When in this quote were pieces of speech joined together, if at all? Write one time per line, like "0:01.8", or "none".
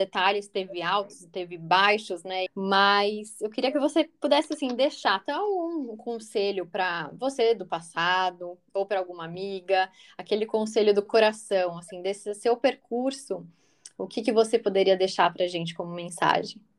0:02.5